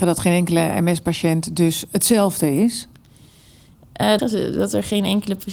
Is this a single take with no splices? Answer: no; 1 cut; at 4.2 s

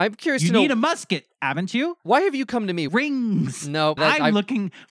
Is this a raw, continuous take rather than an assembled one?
no; 2 cuts; at 2.9 s, 4.0 s

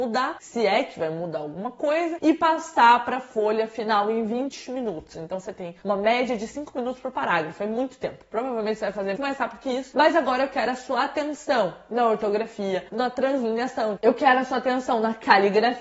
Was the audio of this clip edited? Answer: yes; 3 cuts; at 9.1 s, 12.9 s, 14.0 s

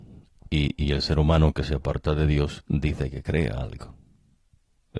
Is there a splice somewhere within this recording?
no; 0 cuts

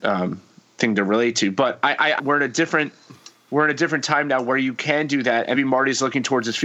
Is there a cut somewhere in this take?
yes; 2 cuts; at 2.2 s, 5.5 s

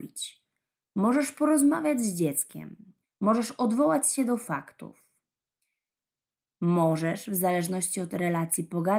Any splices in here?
yes; 1 cut; at 3.0 s

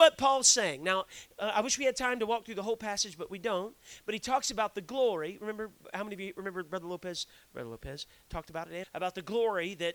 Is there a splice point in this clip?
yes; 1 cut; at 8.8 s

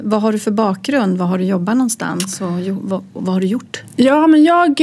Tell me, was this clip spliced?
no; 0 cuts

